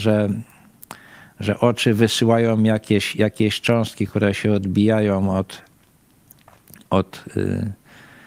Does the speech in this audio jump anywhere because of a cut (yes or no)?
no